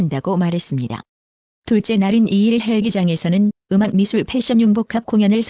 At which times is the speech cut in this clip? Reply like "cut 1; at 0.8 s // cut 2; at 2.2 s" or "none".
cut 1; at 1.6 s